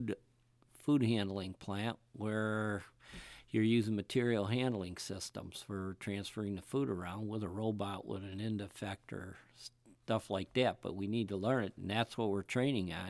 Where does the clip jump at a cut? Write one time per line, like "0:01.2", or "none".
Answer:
0:11.8